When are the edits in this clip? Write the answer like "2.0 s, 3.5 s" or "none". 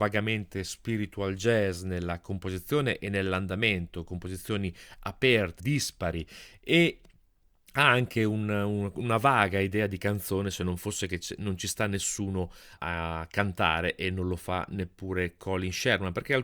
5.6 s, 12.8 s